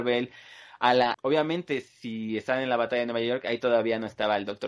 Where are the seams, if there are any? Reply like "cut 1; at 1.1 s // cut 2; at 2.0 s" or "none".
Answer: cut 1; at 1.1 s